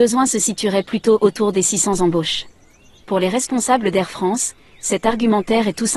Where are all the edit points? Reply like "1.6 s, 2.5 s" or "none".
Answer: 3.0 s